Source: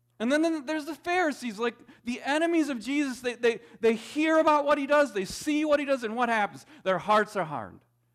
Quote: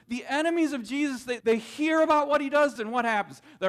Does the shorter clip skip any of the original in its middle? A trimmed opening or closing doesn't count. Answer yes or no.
yes